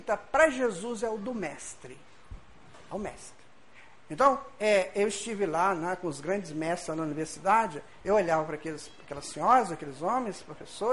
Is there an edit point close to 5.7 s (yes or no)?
no